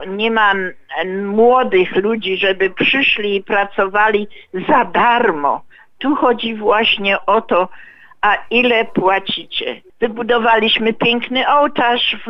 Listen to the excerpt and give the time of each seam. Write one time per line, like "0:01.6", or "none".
0:09.9

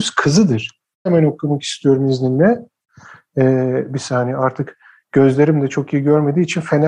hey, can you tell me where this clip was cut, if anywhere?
0:01.1

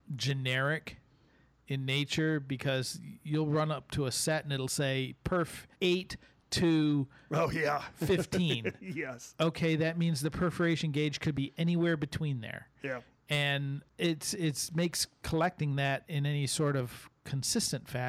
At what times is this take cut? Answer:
0:05.7

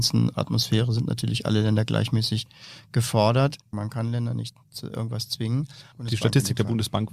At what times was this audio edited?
0:03.7
0:05.9

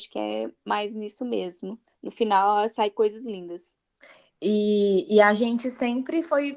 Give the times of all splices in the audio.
0:01.9

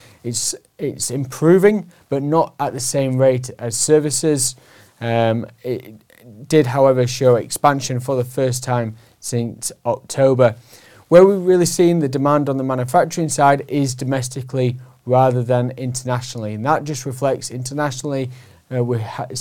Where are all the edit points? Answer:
none

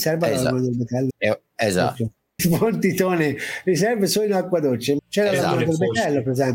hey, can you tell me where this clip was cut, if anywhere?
0:01.1
0:02.4
0:05.0

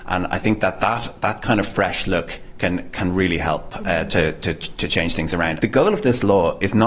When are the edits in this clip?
0:05.6

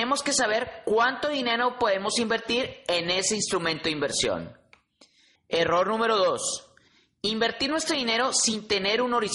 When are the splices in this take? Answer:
0:05.3

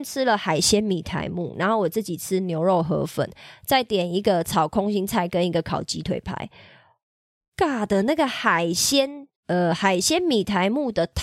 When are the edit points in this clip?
0:09.4

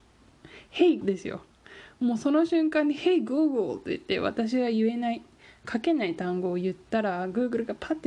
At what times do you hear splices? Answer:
0:01.0

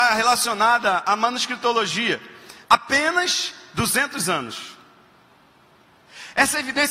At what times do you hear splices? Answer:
0:02.6

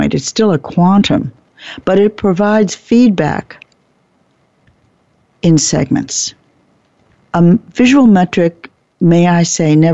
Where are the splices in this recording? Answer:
none

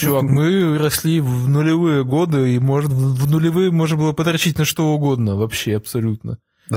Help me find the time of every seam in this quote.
none

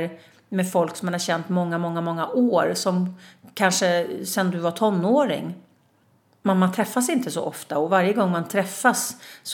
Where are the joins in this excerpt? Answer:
none

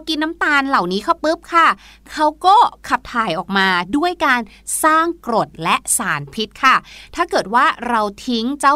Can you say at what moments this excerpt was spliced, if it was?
0:01.2

